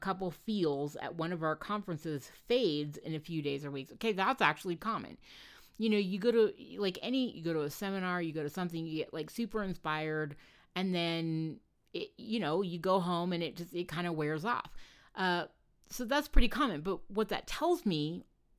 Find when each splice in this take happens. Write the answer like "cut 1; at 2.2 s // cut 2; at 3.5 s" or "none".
cut 1; at 4.8 s // cut 2; at 7.3 s